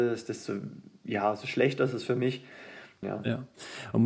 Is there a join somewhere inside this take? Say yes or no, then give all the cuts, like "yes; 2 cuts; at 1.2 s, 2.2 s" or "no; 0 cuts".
yes; 1 cut; at 3.0 s